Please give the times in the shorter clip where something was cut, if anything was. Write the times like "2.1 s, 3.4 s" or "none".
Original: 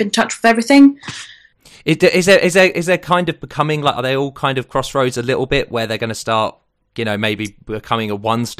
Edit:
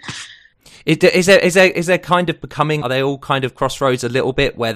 2.8 s